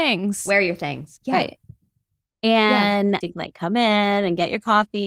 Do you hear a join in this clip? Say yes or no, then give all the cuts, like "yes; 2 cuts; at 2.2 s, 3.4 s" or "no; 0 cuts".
yes; 2 cuts; at 1.2 s, 3.2 s